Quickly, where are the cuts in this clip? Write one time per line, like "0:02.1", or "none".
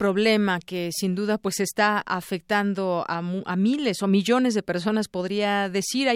none